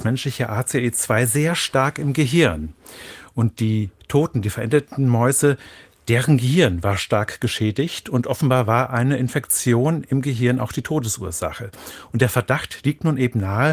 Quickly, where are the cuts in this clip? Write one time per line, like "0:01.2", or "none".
none